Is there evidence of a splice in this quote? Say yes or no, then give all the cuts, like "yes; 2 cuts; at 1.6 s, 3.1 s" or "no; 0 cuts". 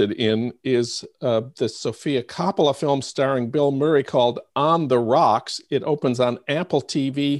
no; 0 cuts